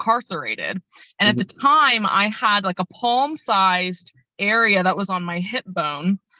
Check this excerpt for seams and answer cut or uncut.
uncut